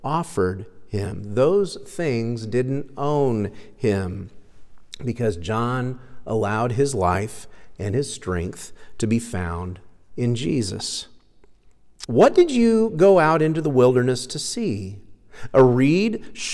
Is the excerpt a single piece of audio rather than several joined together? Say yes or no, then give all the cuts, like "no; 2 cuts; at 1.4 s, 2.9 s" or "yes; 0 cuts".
no; 1 cut; at 12.1 s